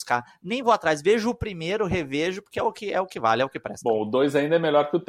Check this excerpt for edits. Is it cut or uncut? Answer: uncut